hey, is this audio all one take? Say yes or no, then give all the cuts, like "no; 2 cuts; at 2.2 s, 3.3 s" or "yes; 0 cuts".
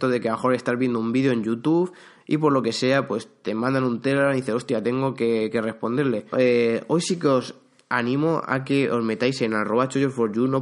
no; 1 cut; at 6.3 s